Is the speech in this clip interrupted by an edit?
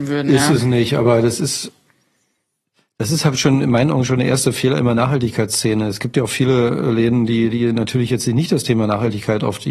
no; 0 cuts

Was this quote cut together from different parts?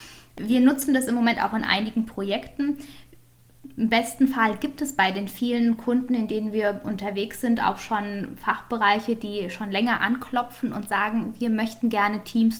no; 0 cuts

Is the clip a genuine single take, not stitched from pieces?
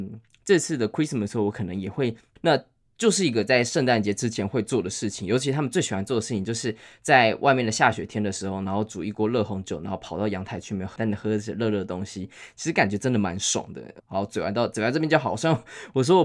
no; 3 cuts; at 2.4 s, 11.0 s, 14.0 s

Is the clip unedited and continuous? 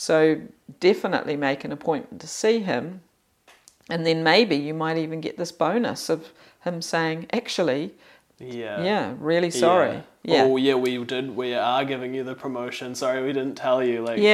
yes; 0 cuts

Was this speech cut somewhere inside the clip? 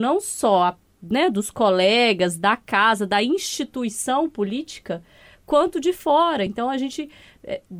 no; 0 cuts

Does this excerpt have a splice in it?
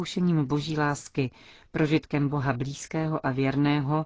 no; 0 cuts

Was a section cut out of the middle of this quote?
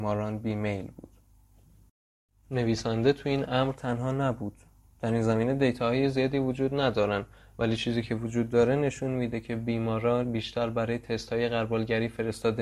no; 0 cuts

